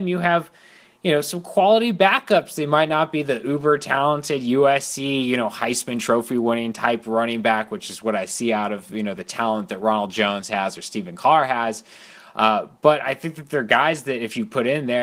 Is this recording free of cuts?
yes; 0 cuts

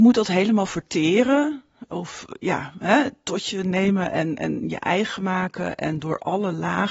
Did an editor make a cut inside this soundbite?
no; 0 cuts

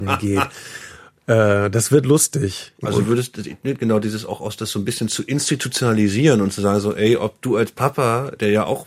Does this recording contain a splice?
yes; 1 cut; at 2.8 s

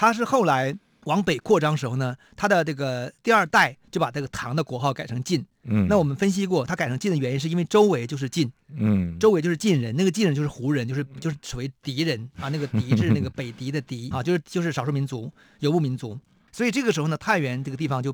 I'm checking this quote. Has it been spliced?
yes; 2 cuts; at 14.1 s, 16.4 s

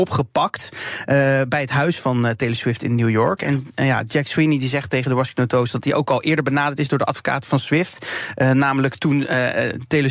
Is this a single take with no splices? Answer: yes; 0 cuts

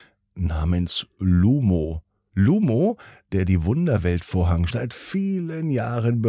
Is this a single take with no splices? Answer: no; 2 cuts; at 2.3 s, 4.7 s

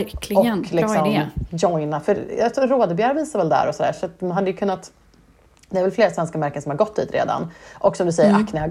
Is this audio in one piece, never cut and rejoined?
yes; 0 cuts

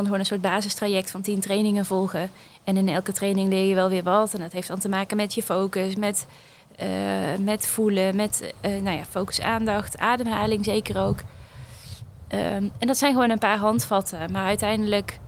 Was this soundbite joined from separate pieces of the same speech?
no; 0 cuts

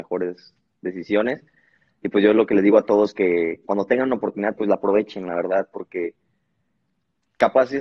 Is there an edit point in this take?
no; 0 cuts

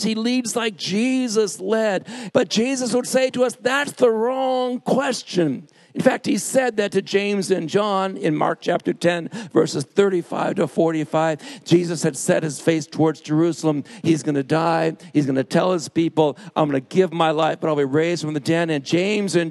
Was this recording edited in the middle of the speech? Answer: yes; 1 cut; at 2.3 s

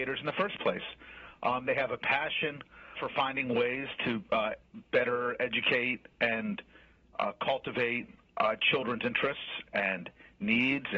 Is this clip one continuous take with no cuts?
no; 1 cut; at 2.9 s

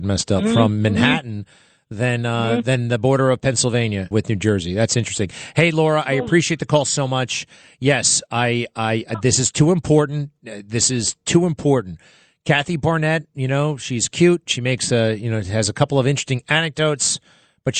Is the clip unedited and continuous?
no; 1 cut; at 4.1 s

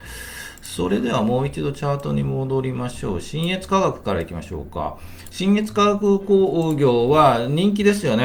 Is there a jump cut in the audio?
no; 0 cuts

